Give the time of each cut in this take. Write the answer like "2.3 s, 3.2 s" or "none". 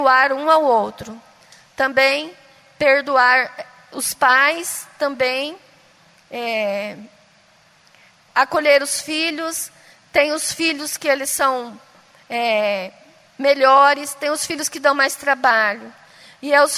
none